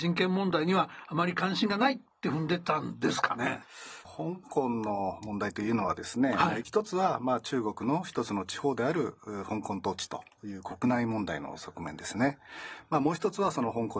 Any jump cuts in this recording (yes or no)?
no